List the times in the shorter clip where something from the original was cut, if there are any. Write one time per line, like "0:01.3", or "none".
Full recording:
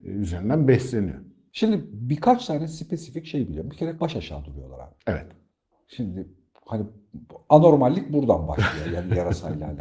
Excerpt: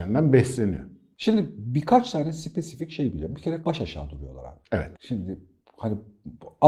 0:04.9

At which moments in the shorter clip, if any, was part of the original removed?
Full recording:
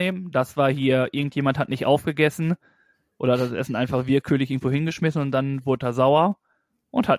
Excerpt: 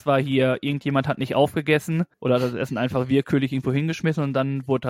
0:02.1

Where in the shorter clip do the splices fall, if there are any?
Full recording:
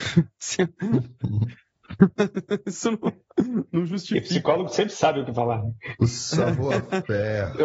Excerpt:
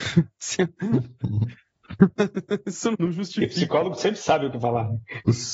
0:02.9

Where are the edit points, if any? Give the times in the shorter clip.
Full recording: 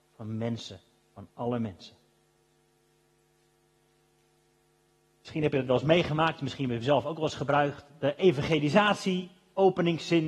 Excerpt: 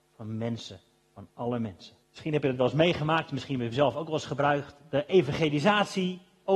0:02.0

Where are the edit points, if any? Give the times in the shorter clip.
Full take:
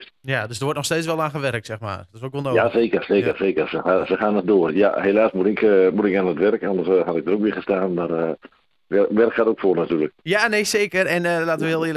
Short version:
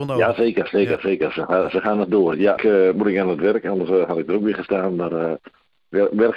0:02.6

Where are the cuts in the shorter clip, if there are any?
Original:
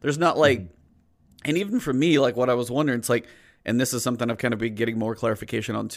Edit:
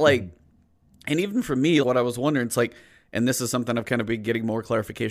0:01.8

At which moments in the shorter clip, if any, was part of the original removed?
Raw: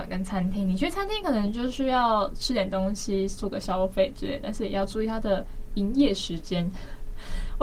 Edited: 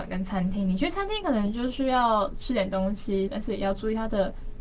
0:03.3

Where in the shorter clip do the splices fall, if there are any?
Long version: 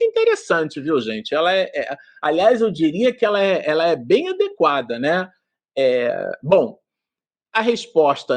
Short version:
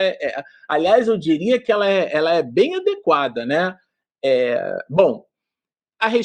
none

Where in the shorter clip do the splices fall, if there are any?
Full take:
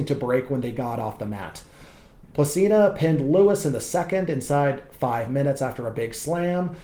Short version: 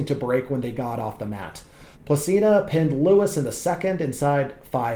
0:01.9

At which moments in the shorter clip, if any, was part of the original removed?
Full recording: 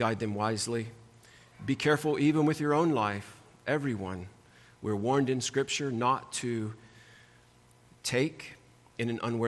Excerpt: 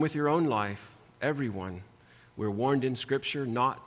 none

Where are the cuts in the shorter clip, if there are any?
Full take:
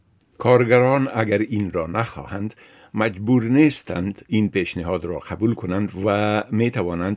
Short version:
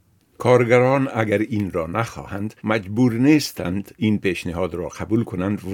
0:02.6

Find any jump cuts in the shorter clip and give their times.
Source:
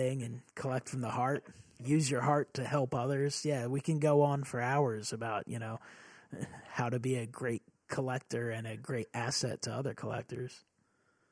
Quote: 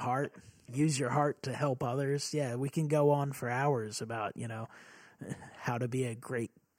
none

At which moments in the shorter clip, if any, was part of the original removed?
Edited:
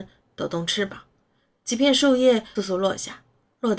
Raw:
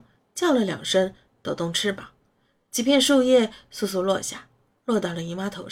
0:02.5

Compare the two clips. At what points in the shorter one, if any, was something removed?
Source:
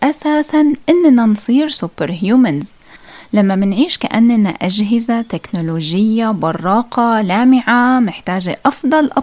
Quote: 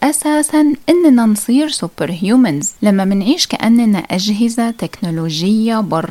0:02.8

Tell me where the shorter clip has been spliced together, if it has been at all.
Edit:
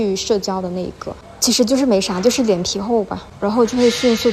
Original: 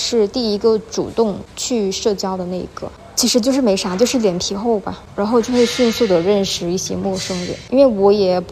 none

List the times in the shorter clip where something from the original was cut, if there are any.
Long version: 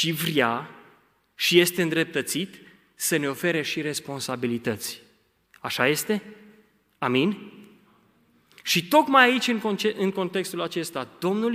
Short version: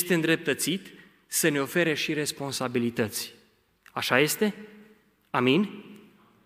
none

